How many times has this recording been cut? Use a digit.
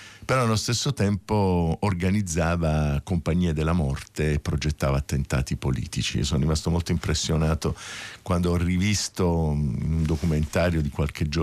0